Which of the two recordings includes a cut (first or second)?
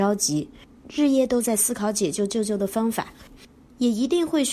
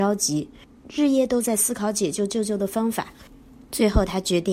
first